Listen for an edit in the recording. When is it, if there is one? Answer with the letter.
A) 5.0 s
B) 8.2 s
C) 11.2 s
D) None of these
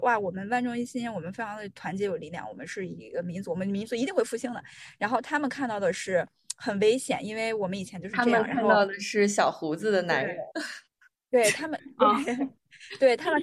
D